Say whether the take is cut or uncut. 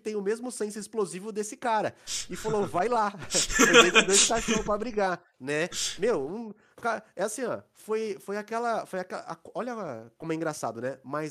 uncut